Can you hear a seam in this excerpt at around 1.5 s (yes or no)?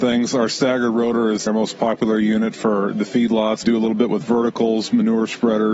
yes